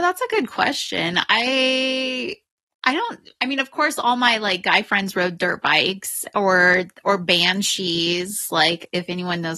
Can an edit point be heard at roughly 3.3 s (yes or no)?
yes